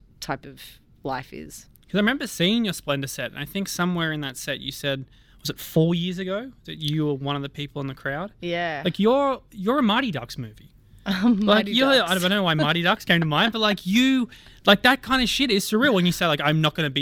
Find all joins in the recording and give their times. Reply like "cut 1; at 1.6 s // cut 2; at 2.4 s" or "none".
none